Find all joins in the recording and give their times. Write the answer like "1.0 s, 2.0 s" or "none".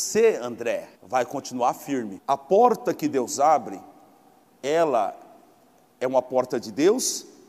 0.9 s, 2.2 s